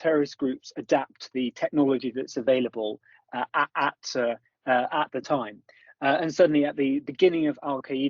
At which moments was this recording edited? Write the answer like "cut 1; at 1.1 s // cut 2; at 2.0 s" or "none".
none